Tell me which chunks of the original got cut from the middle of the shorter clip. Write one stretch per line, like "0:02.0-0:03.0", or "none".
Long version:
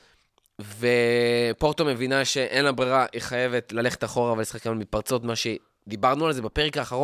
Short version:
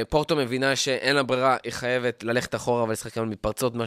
none